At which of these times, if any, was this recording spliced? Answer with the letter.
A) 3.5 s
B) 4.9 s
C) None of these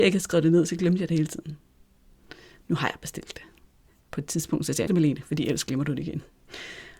B